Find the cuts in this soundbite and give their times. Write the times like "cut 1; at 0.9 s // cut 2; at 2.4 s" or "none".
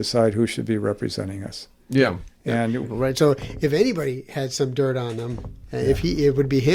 cut 1; at 2.8 s